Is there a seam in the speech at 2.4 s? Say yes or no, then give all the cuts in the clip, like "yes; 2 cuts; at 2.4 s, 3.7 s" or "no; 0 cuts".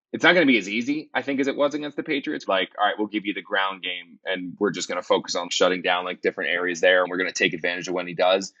yes; 3 cuts; at 2.4 s, 5.5 s, 7.0 s